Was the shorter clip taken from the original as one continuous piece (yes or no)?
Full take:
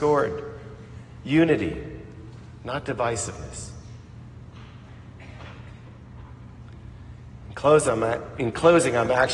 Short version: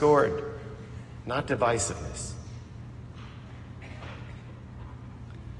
no